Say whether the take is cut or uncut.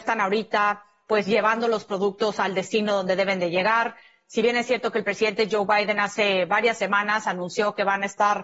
uncut